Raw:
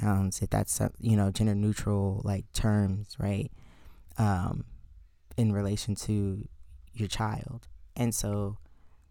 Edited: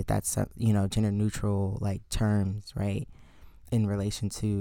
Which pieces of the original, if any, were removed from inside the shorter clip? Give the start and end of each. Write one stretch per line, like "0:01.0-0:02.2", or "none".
0:04.1-0:05.4